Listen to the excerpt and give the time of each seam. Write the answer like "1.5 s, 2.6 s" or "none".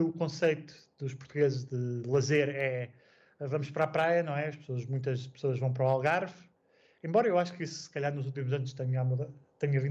none